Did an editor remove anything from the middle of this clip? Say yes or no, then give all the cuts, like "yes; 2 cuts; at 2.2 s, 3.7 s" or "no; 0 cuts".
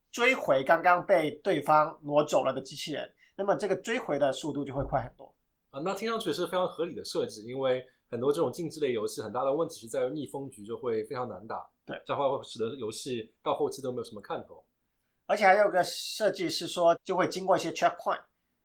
yes; 1 cut; at 17.0 s